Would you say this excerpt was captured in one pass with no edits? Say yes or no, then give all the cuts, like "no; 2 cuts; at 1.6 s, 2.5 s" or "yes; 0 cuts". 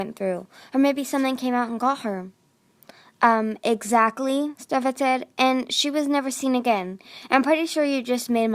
yes; 0 cuts